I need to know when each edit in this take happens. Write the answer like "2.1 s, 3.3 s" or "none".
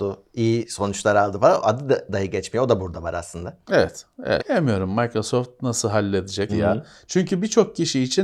4.4 s, 6.5 s